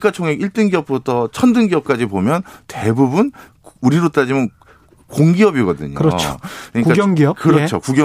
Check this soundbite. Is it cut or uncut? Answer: uncut